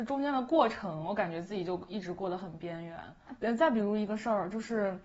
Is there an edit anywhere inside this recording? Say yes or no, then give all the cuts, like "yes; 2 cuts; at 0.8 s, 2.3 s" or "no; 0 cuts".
yes; 1 cut; at 3.4 s